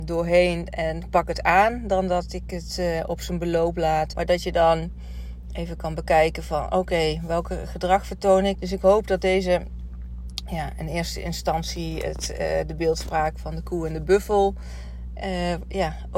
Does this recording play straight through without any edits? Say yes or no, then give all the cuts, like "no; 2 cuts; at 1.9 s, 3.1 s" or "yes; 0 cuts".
no; 2 cuts; at 4.1 s, 8.6 s